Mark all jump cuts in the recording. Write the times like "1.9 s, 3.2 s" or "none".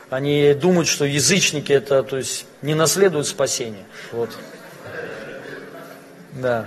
4.1 s